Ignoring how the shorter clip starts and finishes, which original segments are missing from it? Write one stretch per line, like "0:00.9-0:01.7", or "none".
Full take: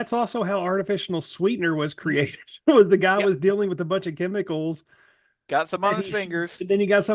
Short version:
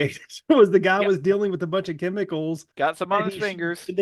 0:04.9-0:05.4